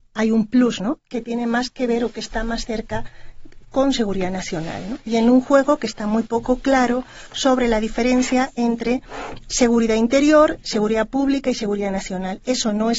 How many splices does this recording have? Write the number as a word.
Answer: one